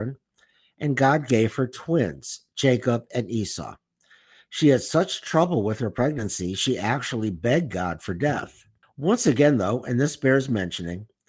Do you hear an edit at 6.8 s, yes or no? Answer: no